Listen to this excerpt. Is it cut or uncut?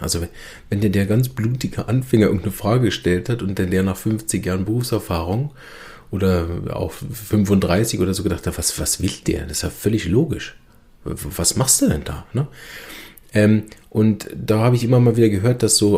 uncut